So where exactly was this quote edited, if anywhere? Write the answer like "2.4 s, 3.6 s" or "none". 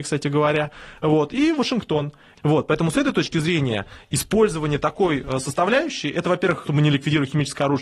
2.4 s, 6.6 s